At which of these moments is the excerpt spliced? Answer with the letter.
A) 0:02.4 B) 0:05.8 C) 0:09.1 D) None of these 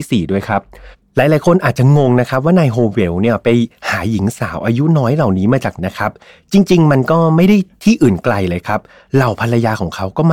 B